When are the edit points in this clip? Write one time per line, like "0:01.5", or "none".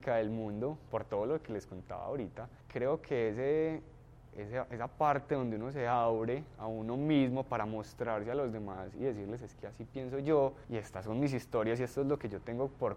0:10.6